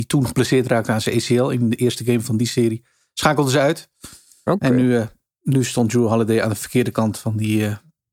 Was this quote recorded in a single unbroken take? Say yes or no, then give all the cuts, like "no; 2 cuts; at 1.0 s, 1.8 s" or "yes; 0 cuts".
yes; 0 cuts